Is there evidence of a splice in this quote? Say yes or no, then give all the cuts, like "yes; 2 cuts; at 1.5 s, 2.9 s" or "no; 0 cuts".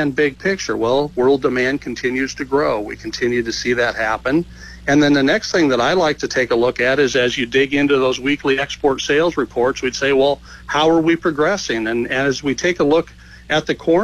no; 0 cuts